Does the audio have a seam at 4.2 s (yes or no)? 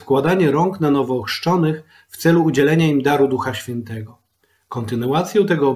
no